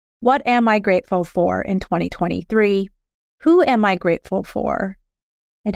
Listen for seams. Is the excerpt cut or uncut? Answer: cut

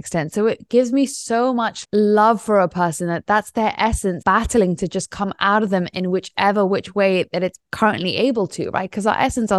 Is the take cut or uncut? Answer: cut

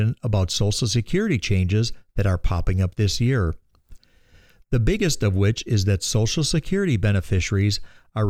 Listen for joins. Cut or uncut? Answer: uncut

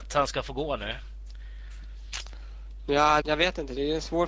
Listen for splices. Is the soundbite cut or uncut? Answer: cut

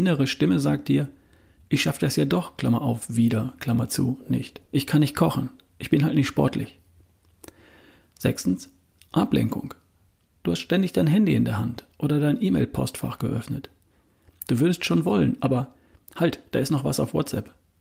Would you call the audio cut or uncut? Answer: cut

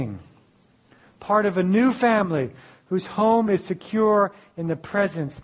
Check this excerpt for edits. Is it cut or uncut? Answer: uncut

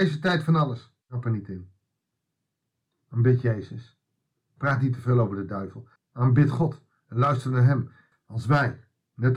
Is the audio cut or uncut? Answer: cut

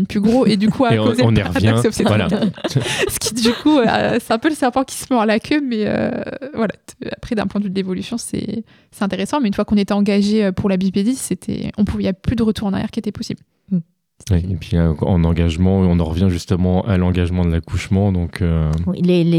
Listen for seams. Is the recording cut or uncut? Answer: uncut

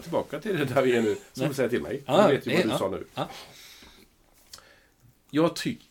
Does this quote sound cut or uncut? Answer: uncut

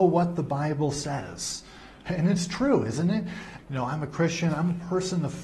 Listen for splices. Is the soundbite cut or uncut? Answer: cut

